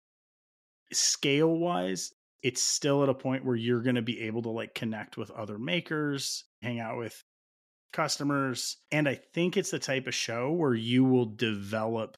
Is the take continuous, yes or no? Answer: no